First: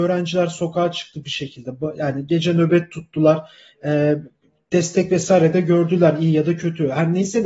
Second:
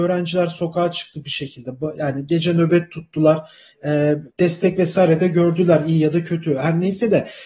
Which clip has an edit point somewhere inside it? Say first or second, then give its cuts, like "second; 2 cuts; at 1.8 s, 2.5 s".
second; 1 cut; at 4.3 s